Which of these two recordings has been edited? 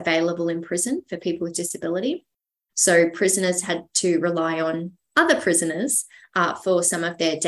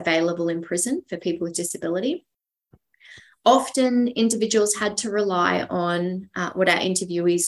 first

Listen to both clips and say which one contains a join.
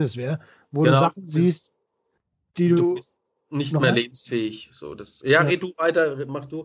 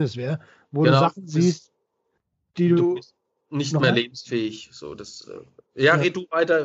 first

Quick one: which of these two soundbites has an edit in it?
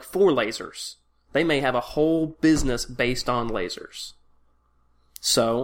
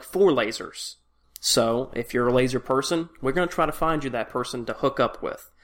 second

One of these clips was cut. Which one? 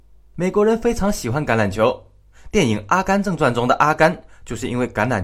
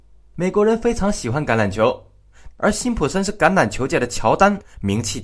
second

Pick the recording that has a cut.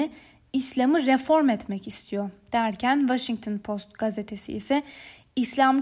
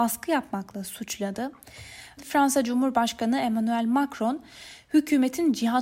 second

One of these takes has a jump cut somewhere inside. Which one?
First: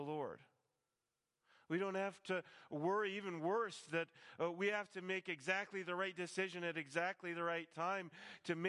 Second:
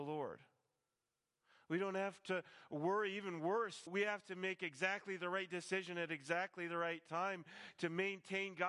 second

